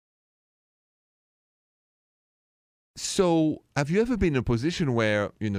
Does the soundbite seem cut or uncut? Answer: uncut